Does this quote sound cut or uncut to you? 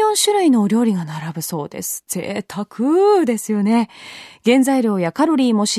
uncut